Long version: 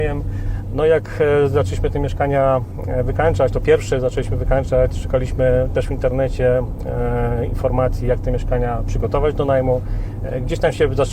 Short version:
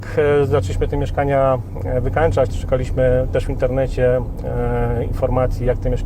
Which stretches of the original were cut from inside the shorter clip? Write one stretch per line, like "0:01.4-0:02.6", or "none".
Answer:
0:03.5-0:04.9